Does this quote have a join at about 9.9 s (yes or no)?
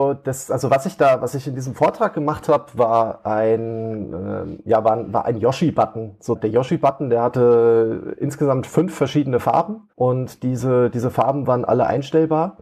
yes